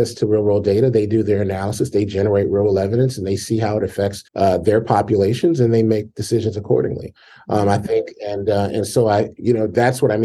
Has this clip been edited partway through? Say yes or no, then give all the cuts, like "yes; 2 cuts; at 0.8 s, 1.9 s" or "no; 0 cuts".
yes; 1 cut; at 4.3 s